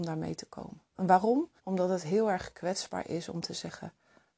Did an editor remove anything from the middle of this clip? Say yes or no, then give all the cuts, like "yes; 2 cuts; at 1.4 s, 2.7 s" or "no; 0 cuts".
yes; 1 cut; at 1.6 s